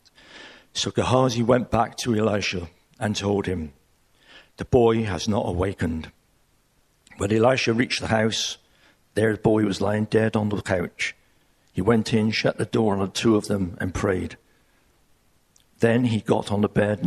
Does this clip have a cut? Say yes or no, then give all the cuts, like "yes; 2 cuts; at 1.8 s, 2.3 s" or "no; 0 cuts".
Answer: no; 0 cuts